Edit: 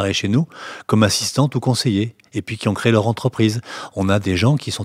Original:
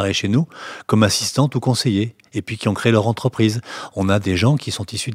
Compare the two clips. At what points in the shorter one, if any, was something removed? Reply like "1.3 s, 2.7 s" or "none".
none